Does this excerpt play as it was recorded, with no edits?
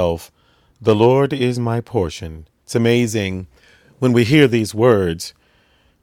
no; 1 cut; at 2.6 s

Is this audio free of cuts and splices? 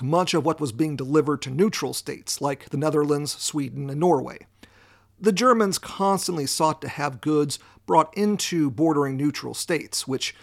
yes; 0 cuts

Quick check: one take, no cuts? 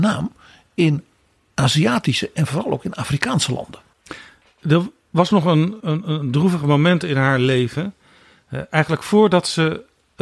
no; 1 cut; at 5.8 s

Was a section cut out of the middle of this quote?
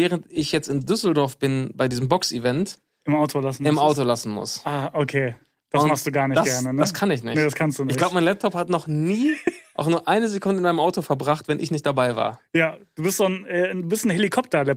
no; 0 cuts

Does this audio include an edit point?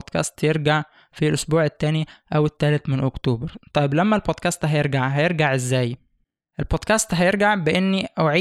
no; 0 cuts

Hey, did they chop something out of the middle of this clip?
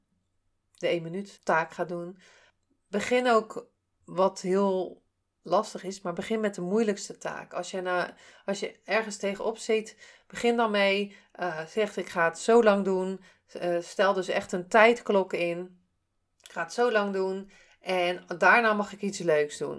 no; 0 cuts

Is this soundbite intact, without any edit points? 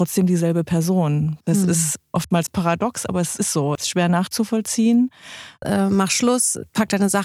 no; 2 cuts; at 3.8 s, 5.6 s

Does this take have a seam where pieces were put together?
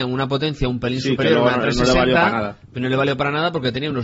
no; 0 cuts

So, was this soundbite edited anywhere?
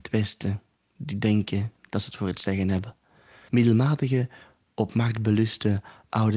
yes; 1 cut; at 3.5 s

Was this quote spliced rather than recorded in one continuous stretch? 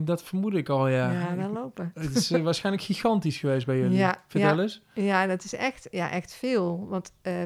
yes; 1 cut; at 5.9 s

